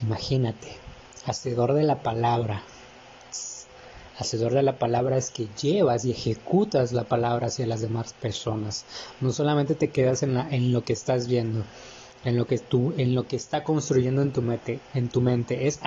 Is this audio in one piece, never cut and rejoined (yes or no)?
yes